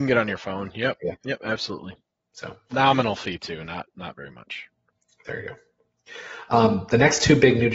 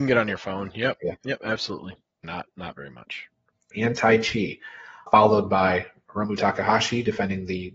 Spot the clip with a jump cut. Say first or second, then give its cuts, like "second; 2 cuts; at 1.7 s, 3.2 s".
second; 3 cuts; at 2.2 s, 3.7 s, 5.1 s